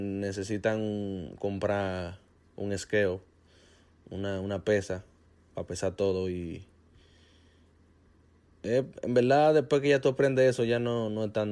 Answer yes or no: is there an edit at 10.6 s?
no